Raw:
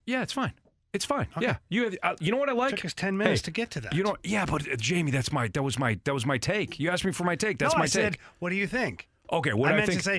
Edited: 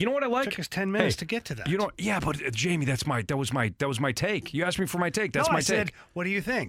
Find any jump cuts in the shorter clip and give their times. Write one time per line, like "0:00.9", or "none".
none